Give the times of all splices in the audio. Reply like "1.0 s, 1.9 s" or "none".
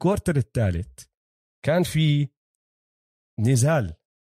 none

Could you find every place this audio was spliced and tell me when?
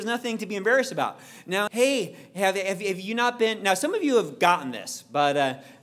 1.7 s

